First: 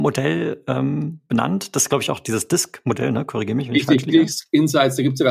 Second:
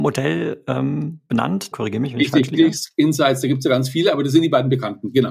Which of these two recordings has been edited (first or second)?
second